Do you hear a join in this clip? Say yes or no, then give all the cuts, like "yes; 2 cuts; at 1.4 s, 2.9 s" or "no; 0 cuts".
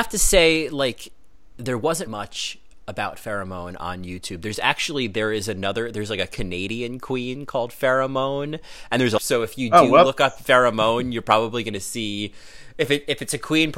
yes; 2 cuts; at 2.1 s, 9.2 s